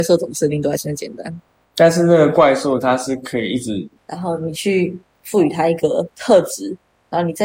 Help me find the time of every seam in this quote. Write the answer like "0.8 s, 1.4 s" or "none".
4.0 s